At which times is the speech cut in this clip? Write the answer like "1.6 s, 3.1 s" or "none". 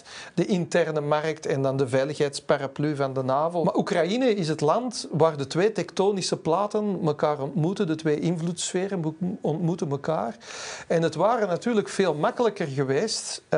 3.6 s